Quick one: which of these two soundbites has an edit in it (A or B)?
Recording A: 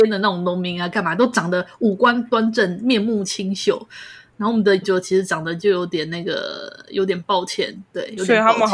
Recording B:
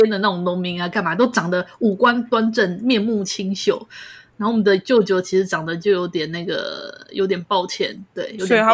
A